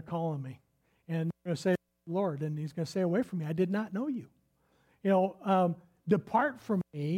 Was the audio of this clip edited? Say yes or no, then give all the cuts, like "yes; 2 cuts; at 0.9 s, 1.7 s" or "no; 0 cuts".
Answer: no; 0 cuts